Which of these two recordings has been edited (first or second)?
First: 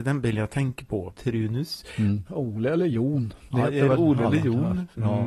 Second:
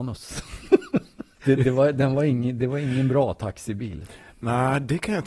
first